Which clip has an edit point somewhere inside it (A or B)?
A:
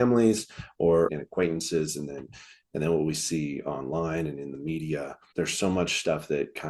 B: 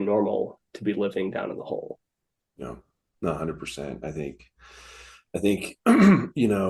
A